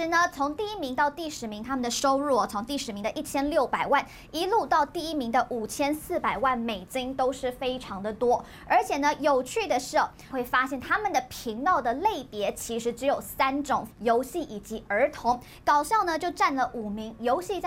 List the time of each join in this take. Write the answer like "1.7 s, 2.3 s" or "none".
10.3 s, 13.9 s